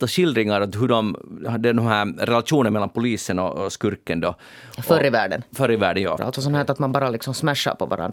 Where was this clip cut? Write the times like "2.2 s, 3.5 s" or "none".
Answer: 6.2 s